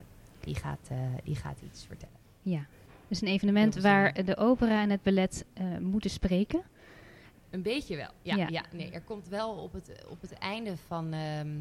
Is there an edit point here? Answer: yes; 2 cuts; at 2.7 s, 7.3 s

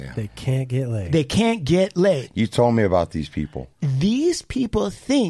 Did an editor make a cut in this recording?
no; 0 cuts

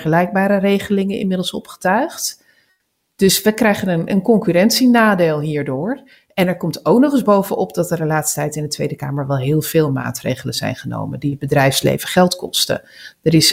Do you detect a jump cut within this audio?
no; 0 cuts

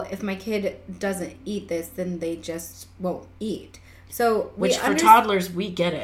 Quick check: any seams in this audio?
no; 0 cuts

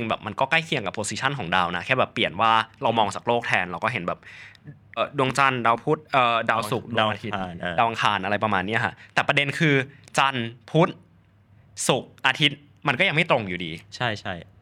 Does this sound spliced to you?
yes; 2 cuts; at 5.0 s, 6.1 s

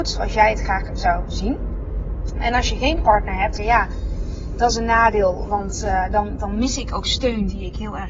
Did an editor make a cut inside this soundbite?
yes; 1 cut; at 3.6 s

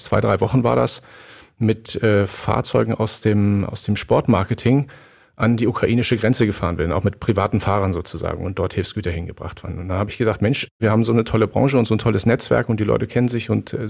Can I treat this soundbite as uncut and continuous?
yes; 0 cuts

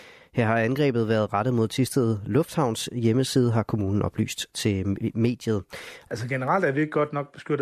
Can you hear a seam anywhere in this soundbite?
yes; 1 cut; at 6.1 s

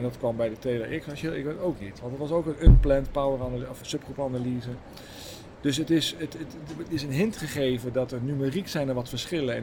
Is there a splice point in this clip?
yes; 1 cut; at 3.8 s

